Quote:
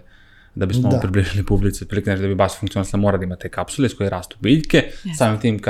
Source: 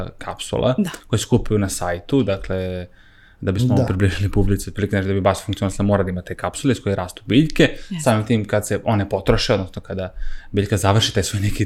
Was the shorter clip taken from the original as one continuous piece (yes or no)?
yes